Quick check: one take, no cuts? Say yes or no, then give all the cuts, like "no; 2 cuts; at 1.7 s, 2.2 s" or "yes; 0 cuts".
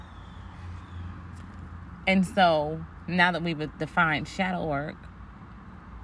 yes; 0 cuts